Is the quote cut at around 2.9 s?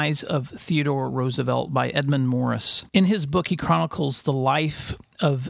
yes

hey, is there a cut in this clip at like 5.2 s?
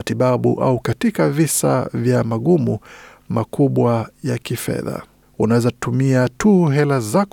yes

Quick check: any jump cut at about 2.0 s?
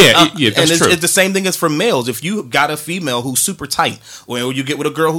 no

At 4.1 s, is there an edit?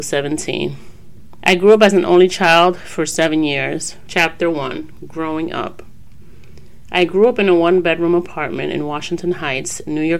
yes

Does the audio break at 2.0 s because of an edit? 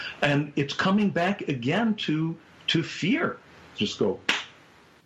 no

